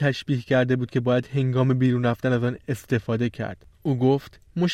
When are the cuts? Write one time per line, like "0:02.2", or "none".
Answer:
0:03.7

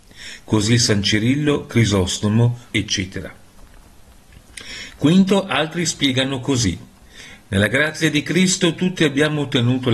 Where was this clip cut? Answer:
0:02.7

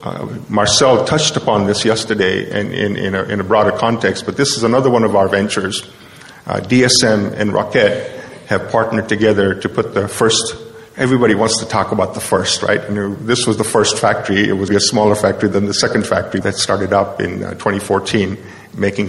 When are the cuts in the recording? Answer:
0:14.7
0:16.4

